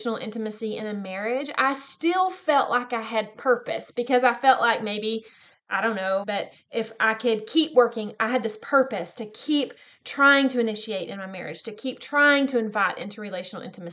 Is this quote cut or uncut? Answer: cut